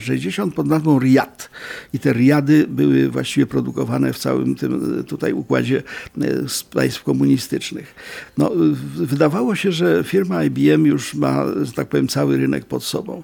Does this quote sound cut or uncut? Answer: uncut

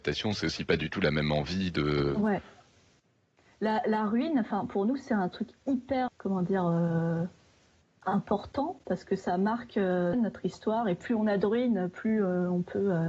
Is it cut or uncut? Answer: cut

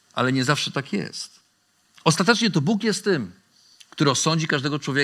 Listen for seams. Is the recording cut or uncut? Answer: uncut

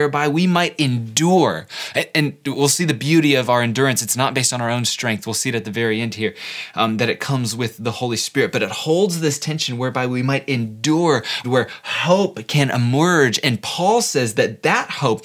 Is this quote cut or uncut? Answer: cut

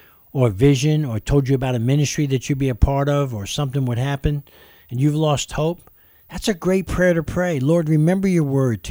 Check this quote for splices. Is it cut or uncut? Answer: uncut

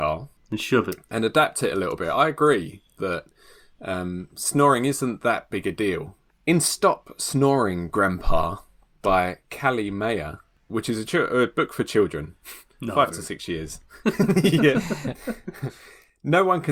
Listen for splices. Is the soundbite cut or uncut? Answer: uncut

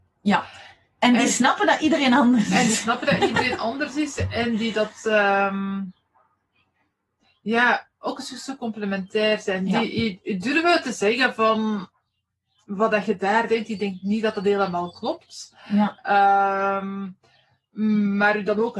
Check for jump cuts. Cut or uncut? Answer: uncut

